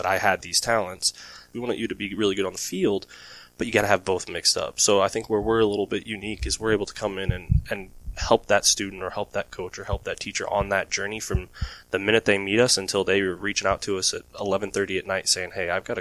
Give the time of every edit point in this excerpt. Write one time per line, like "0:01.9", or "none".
0:01.5